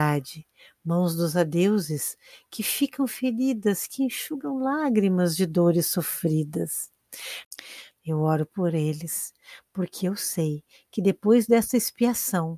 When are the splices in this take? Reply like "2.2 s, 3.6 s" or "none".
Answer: 7.9 s